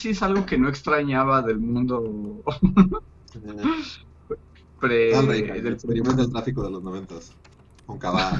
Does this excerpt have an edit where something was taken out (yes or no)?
no